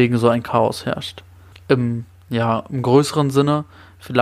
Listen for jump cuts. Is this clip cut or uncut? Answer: cut